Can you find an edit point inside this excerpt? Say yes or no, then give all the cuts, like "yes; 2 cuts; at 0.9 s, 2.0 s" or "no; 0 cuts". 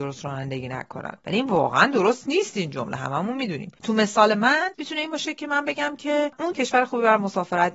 yes; 1 cut; at 6.5 s